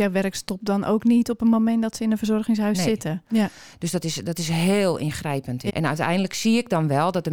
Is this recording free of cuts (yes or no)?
no